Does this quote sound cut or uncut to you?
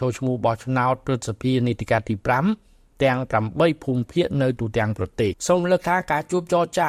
cut